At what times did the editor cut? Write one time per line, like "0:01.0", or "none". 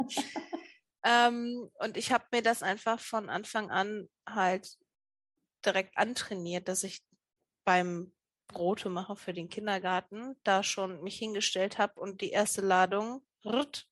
none